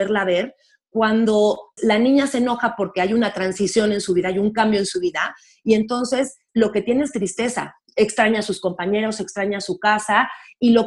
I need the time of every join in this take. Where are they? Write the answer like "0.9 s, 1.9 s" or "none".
1.8 s, 6.5 s